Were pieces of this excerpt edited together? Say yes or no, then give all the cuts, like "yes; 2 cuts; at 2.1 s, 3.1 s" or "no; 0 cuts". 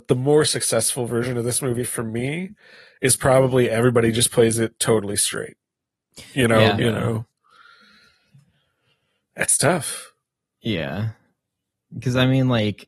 yes; 1 cut; at 6.8 s